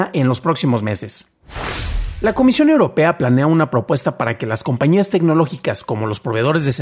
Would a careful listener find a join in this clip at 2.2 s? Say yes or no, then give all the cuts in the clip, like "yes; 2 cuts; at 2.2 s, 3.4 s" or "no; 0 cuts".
no; 0 cuts